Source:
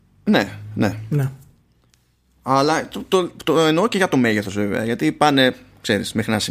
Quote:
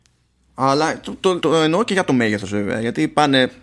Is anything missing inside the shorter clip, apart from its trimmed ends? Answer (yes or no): yes